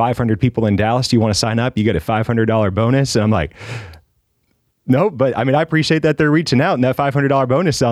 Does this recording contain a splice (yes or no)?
no